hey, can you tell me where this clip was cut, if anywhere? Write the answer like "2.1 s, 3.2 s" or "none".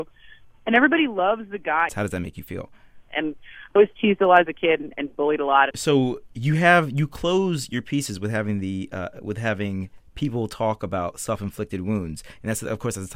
1.9 s, 3.1 s, 5.7 s

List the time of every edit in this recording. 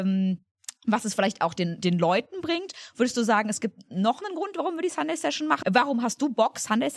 5.6 s

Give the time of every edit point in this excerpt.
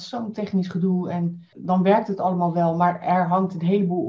1.5 s

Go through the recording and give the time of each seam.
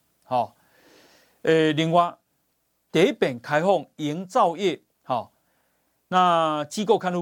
4.9 s

